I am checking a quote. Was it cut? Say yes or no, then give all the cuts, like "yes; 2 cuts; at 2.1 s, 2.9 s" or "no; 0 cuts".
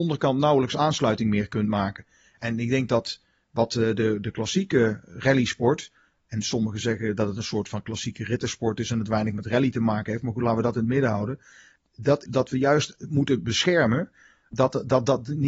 yes; 1 cut; at 12.3 s